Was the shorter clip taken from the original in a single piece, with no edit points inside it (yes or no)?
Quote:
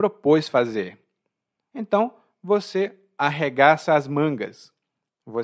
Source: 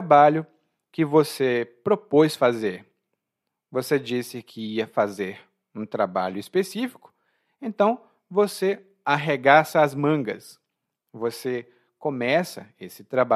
no